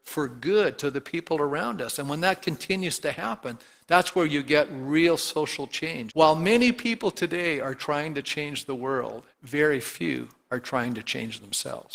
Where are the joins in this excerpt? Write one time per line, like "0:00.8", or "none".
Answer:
0:06.1
0:09.3